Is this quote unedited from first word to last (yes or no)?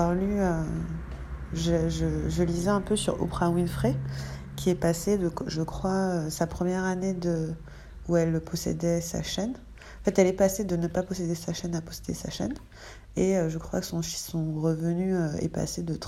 yes